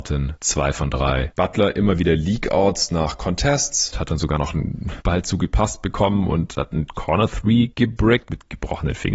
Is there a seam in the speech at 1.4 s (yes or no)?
yes